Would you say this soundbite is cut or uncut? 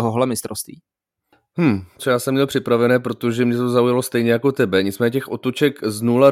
cut